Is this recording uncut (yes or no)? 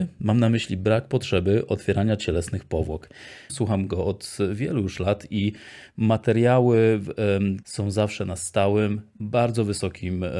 no